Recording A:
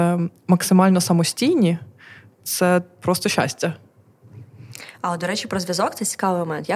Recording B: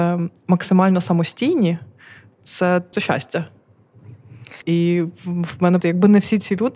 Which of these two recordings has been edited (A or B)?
B